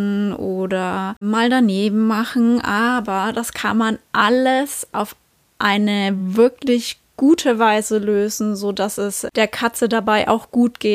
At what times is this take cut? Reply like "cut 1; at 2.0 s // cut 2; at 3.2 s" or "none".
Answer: none